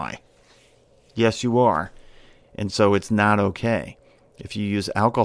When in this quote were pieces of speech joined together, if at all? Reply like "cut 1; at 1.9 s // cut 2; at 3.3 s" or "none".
cut 1; at 2.4 s